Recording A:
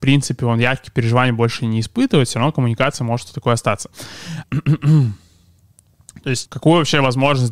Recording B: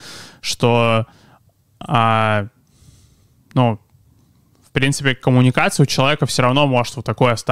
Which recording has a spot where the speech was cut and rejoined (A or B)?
A